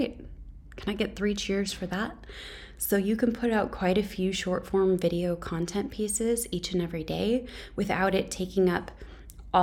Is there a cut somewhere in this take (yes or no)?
no